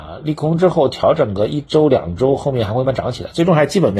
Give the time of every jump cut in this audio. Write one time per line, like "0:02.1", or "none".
0:02.8